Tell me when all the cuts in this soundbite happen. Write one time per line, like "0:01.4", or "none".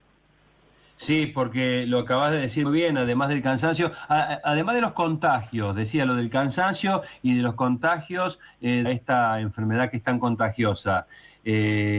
0:02.6
0:08.8